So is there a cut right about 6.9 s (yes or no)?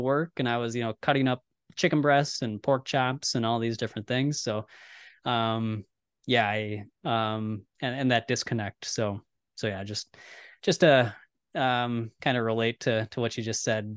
yes